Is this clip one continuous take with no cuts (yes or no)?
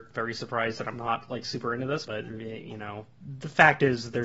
no